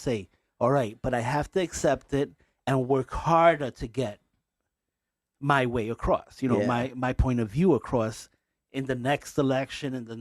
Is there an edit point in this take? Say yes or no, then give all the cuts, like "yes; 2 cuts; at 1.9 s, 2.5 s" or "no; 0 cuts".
no; 0 cuts